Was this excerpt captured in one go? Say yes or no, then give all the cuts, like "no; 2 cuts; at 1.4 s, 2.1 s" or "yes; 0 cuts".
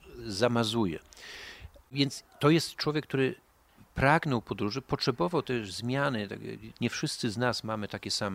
no; 1 cut; at 6.7 s